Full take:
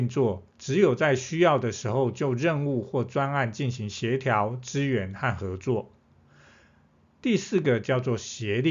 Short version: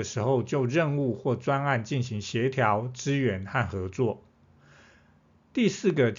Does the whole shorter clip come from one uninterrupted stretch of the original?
yes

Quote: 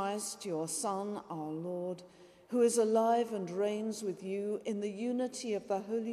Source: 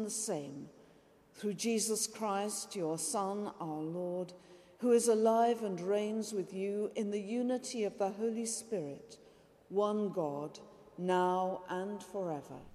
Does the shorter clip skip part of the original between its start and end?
no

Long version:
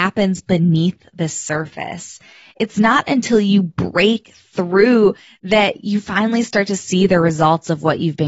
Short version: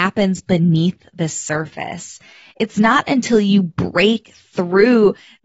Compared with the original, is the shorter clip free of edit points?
yes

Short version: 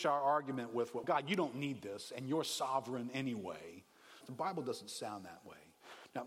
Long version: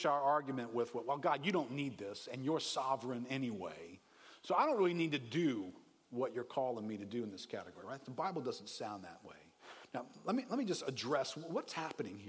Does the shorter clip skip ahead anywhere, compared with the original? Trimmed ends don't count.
yes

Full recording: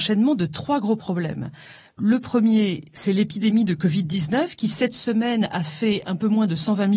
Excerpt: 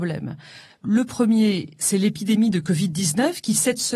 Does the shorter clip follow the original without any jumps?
yes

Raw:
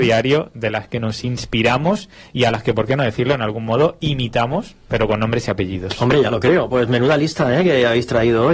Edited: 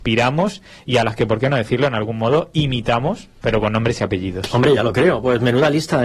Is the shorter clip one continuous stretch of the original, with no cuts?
yes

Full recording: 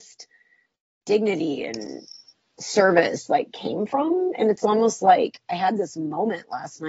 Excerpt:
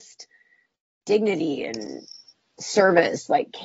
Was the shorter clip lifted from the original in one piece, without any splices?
yes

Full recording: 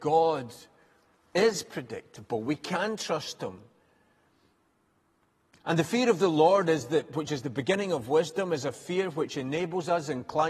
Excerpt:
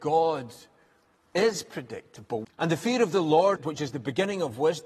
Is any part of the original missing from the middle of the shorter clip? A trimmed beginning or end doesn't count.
yes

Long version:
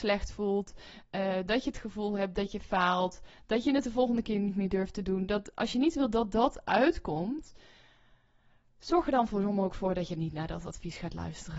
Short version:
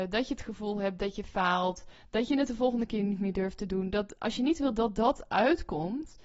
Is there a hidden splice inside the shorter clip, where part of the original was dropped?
no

